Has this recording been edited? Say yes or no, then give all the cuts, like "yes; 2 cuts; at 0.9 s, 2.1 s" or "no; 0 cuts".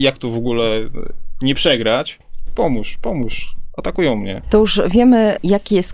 yes; 1 cut; at 2.5 s